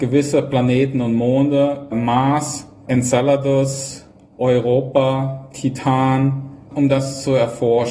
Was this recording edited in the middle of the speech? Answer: yes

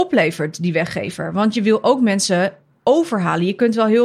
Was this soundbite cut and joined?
no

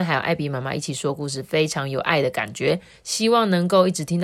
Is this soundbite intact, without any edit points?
yes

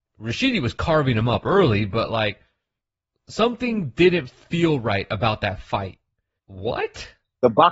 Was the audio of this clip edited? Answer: yes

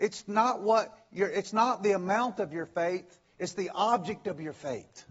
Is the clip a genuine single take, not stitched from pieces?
yes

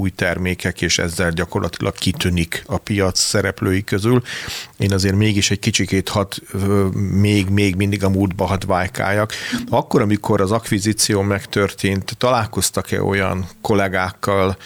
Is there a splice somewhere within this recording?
no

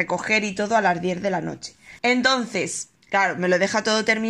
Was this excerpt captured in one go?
no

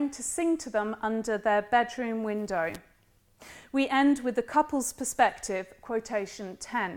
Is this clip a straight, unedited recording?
yes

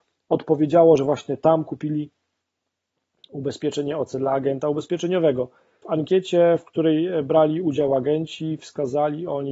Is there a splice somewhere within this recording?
yes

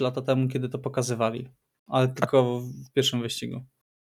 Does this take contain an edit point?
no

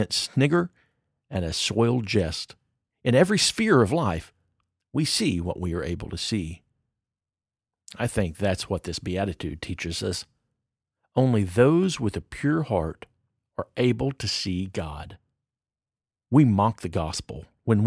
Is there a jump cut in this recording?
no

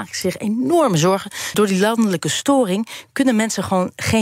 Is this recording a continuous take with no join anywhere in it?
no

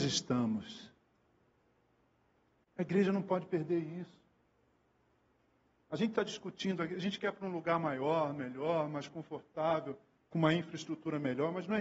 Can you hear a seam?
no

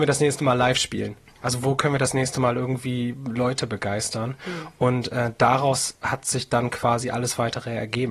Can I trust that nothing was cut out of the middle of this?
yes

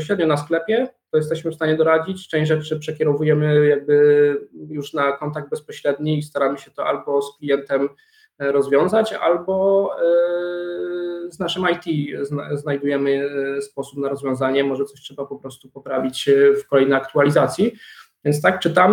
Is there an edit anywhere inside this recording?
no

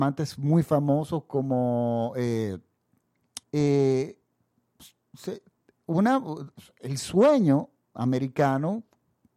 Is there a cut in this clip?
yes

